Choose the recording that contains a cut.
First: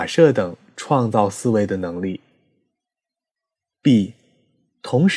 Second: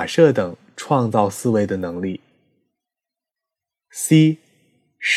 first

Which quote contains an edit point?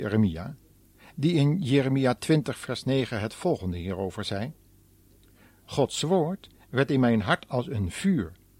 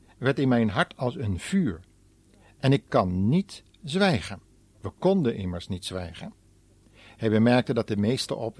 second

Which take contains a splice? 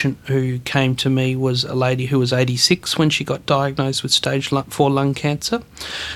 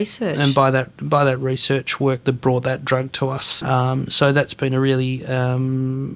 second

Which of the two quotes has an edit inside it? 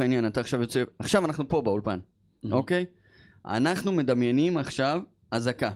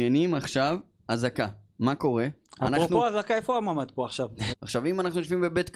second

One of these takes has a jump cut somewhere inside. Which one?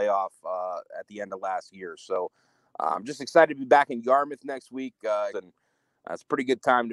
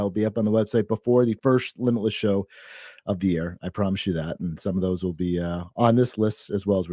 first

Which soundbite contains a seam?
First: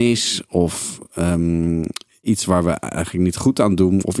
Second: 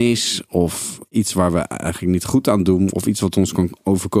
second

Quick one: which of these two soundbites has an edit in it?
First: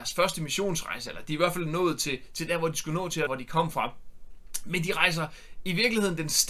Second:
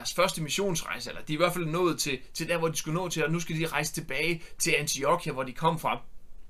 first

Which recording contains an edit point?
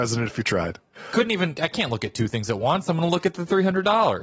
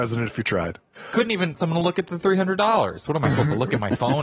second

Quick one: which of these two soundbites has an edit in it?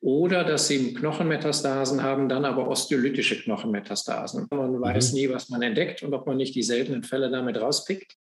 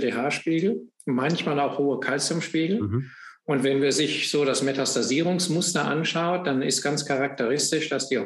first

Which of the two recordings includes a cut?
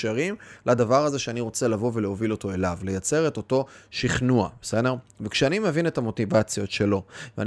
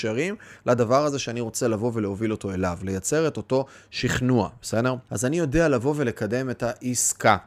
second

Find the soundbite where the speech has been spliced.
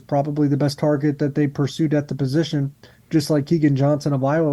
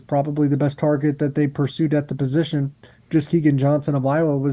second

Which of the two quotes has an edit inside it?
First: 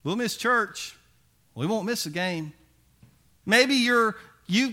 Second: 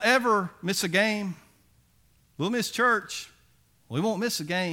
first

